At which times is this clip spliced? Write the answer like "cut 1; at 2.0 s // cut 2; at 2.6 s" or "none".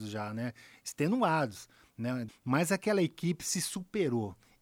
cut 1; at 2.3 s